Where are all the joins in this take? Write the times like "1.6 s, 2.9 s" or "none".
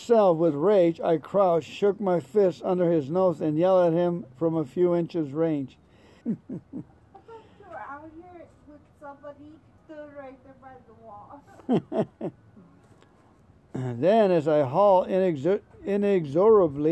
6.2 s, 9.8 s, 12.6 s